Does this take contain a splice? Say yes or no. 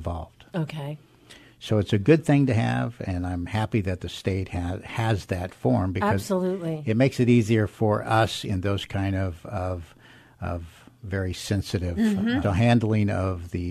yes